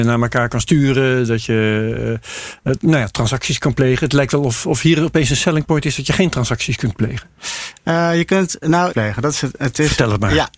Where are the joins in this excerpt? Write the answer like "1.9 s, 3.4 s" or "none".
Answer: 8.9 s